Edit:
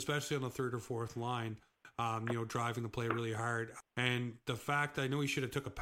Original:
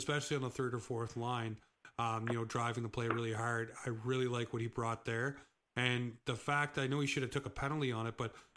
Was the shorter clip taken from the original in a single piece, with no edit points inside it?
no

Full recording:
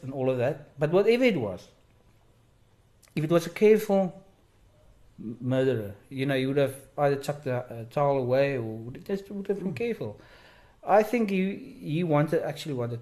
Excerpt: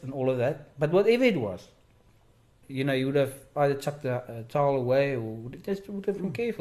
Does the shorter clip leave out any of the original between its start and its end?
yes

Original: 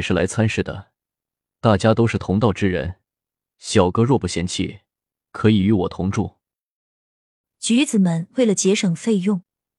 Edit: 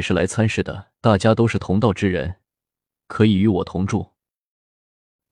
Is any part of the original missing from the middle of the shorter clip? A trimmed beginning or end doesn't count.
yes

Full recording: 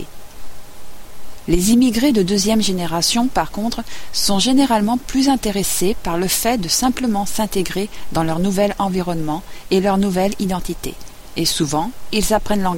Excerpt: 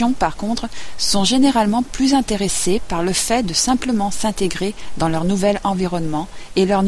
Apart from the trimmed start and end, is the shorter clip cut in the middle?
no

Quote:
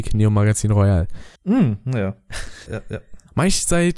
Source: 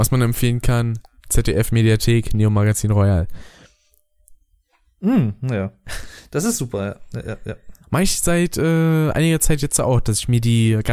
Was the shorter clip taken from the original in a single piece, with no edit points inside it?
no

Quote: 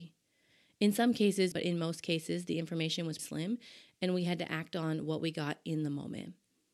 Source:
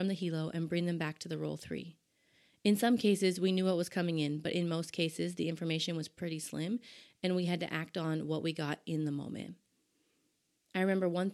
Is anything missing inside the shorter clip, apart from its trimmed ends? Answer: yes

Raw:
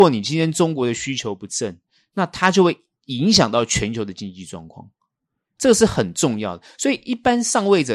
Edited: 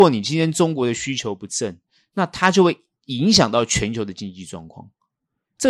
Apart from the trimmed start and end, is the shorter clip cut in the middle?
no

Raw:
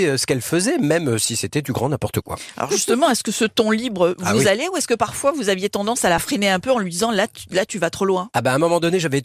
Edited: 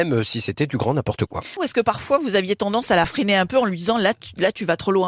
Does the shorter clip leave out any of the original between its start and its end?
yes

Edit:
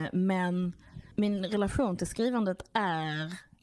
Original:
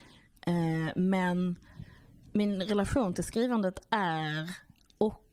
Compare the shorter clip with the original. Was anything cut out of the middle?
yes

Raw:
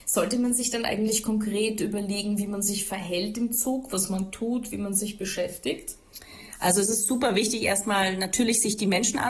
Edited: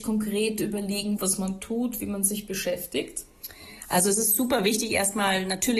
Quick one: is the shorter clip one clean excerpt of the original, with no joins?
no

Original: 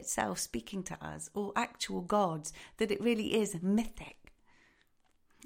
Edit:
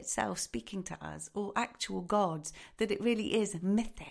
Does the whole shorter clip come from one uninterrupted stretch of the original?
yes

